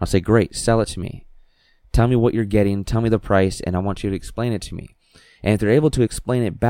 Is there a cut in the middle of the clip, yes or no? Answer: no